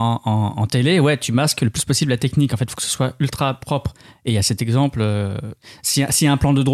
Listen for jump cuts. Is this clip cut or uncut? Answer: uncut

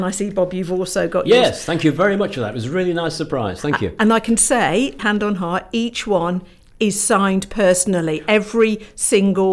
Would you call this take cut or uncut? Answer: cut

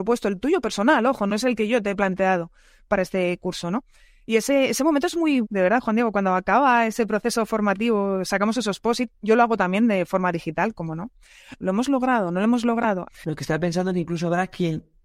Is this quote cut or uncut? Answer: cut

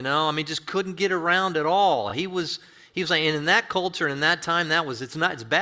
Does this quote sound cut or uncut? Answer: uncut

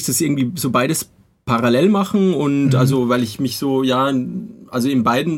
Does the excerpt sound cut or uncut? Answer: uncut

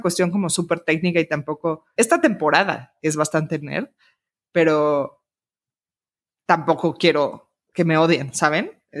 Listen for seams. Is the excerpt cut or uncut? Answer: cut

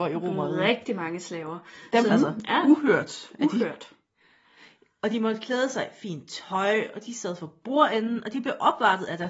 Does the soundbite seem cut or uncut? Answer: cut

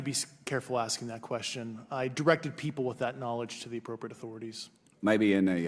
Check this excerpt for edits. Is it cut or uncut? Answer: uncut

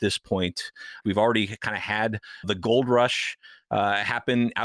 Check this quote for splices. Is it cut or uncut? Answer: cut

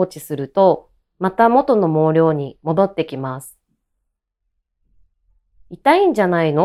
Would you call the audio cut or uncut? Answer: uncut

